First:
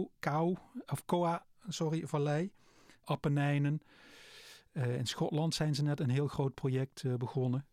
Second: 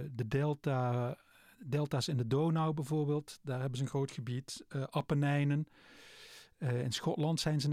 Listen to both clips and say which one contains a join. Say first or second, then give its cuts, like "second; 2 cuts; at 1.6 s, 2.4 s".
first; 1 cut; at 3.0 s